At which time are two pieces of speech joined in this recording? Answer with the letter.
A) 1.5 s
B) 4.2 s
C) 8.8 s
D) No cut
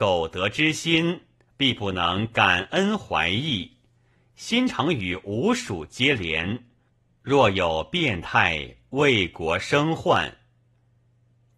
A